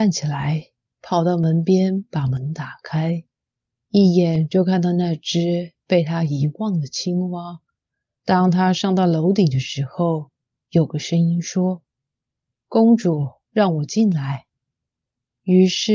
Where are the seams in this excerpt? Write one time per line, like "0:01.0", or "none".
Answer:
0:08.2
0:10.6
0:13.4